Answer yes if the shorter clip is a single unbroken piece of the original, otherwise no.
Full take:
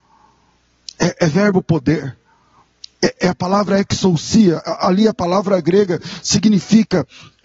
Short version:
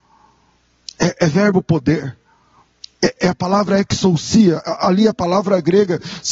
yes